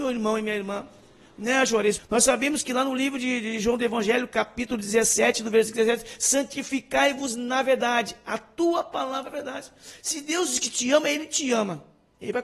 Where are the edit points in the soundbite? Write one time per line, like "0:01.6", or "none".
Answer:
0:02.0

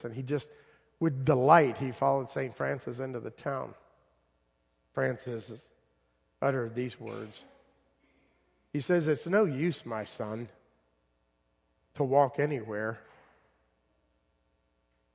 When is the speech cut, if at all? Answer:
0:04.9

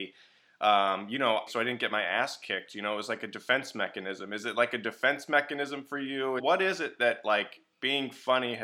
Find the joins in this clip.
0:01.5
0:06.4

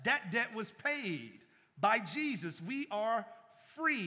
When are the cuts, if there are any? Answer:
none

